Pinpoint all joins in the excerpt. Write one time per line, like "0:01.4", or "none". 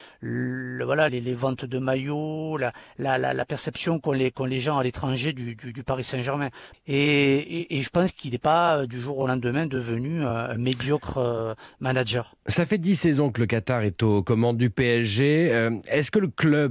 0:01.1
0:06.7